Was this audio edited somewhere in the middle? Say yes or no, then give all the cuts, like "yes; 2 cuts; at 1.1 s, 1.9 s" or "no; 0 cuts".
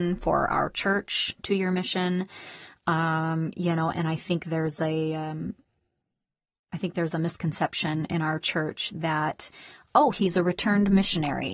no; 0 cuts